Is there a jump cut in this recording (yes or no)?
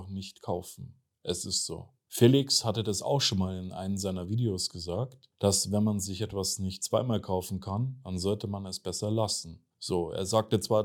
no